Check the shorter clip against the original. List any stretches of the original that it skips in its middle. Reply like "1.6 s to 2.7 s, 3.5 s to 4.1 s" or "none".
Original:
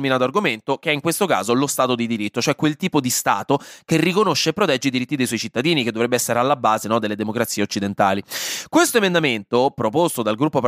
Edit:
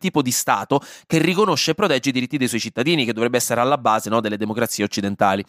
none

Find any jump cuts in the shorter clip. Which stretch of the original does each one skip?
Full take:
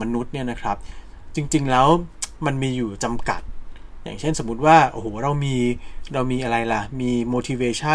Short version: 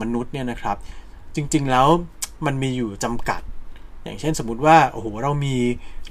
none

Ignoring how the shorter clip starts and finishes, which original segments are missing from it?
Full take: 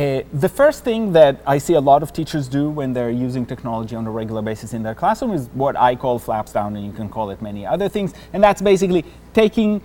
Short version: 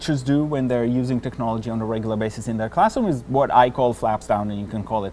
none

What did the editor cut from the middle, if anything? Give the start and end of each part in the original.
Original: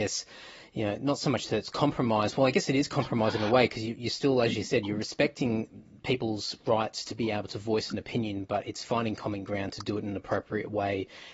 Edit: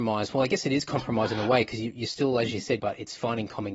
4.8 s to 8.5 s

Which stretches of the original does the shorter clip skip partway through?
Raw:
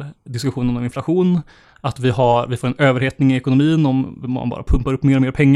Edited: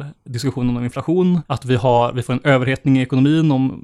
1.4 s to 1.8 s

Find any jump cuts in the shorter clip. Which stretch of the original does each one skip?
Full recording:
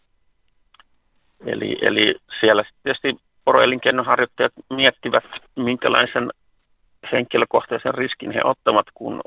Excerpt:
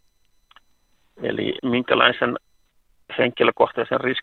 1.8 s to 5.5 s

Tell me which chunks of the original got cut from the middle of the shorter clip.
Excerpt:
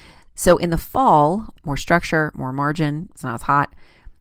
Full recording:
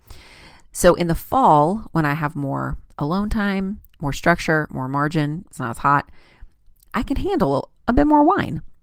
1.9 s to 3.9 s

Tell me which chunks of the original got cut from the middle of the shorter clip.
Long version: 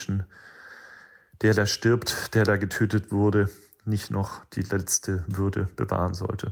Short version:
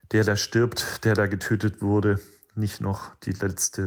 none

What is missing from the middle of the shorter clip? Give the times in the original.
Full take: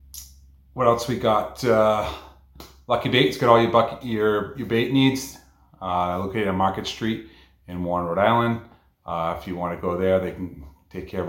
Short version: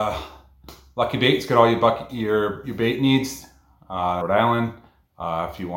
6.1 s to 8.1 s

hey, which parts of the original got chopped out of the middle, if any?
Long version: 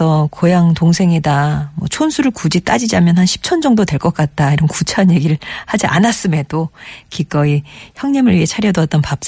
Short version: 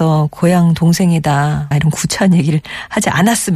1.7 s to 4.5 s

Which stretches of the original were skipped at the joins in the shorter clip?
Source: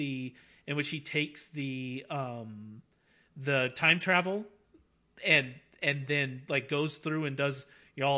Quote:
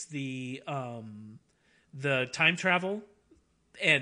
none

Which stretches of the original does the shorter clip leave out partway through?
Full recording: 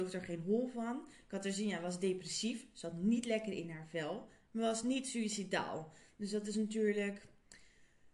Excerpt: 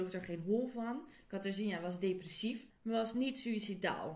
2.7 s to 4.4 s

